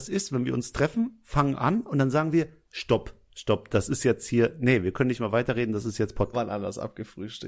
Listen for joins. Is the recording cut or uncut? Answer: cut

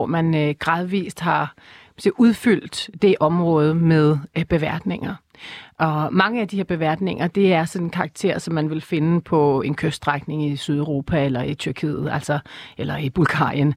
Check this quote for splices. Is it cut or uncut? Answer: uncut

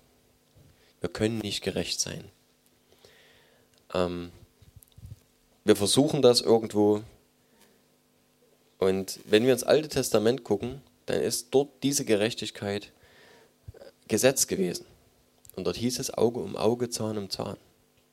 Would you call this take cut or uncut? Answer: uncut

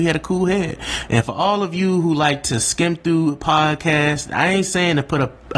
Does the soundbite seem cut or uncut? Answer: cut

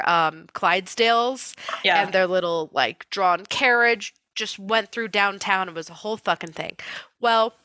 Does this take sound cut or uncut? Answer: uncut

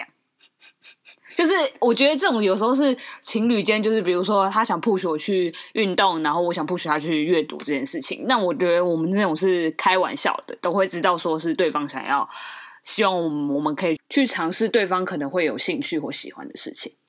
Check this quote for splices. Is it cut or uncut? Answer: cut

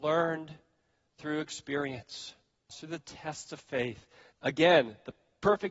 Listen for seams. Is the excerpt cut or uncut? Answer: cut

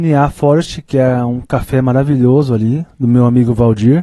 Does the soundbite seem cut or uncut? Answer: uncut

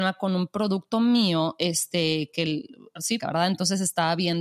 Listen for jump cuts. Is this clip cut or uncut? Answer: cut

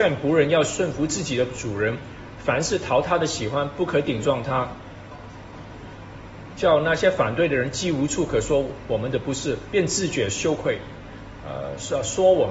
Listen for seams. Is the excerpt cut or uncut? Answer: cut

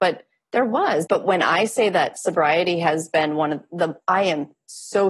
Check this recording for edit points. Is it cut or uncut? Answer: cut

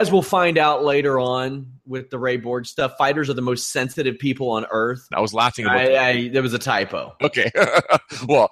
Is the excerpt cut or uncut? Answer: cut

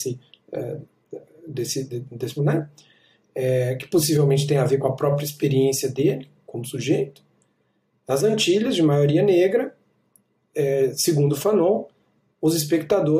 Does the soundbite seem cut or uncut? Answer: cut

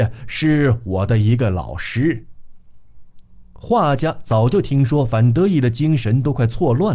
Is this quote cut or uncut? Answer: uncut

